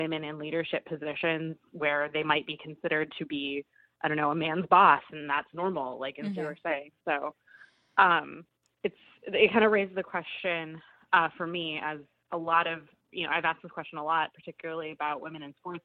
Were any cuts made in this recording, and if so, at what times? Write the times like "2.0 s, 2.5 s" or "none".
6.4 s

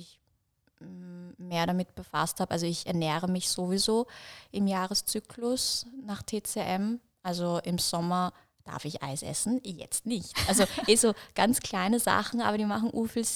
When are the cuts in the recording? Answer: none

